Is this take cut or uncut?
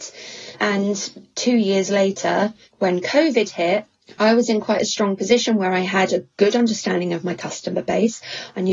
uncut